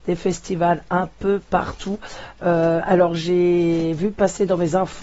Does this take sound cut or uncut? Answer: uncut